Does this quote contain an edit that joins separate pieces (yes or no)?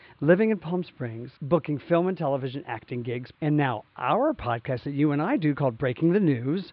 yes